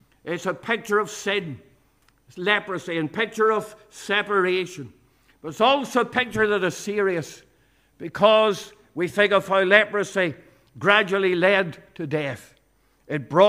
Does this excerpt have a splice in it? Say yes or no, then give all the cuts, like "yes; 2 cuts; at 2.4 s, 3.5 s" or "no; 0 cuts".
no; 0 cuts